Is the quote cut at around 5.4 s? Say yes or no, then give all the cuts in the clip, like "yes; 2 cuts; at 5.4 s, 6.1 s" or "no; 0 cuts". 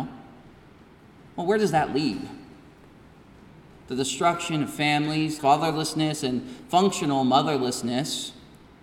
yes; 1 cut; at 5.4 s